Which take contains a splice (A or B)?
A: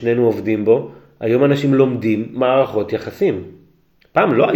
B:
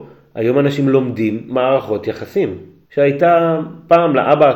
B